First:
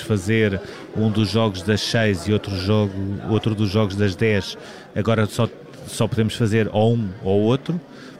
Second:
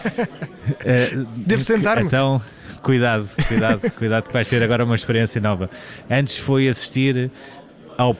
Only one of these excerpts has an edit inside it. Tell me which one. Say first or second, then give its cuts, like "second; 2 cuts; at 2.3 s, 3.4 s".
second; 1 cut; at 1.4 s